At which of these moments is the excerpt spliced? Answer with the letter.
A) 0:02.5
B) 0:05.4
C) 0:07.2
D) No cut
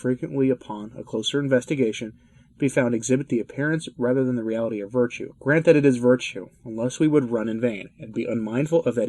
B